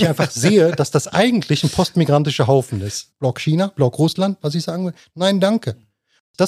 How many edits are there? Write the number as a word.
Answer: two